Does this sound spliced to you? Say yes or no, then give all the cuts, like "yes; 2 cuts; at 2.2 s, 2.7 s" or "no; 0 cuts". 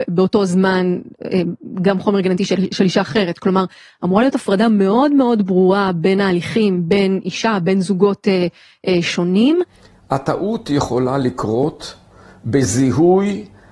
no; 0 cuts